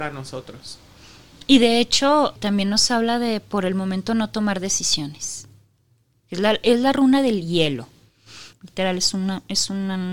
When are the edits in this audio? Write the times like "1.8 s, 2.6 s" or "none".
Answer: 2.4 s, 8.5 s

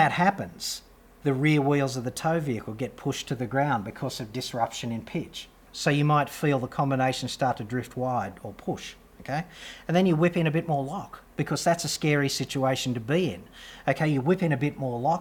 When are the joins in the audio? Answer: 5.7 s

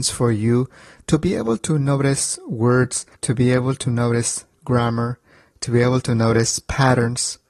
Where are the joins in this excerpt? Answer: 3.1 s

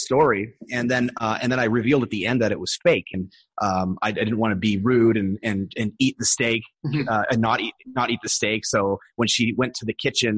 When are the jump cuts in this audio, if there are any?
3.1 s

